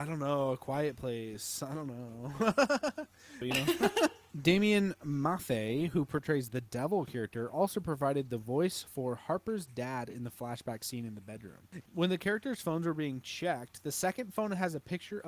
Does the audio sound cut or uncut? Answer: cut